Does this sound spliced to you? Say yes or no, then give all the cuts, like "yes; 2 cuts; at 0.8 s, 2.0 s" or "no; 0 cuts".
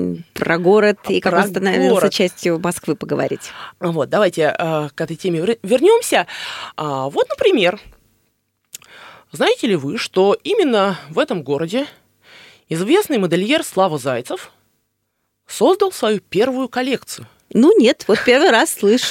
yes; 3 cuts; at 3.7 s, 6.7 s, 18.0 s